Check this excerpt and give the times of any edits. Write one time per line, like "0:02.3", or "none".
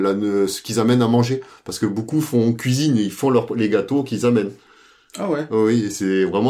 none